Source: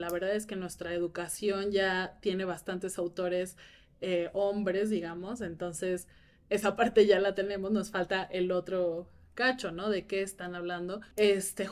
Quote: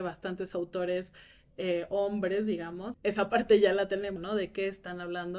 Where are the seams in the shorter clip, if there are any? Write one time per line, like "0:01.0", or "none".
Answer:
0:02.9
0:04.2